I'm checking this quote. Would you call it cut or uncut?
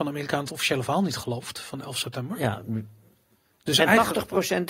uncut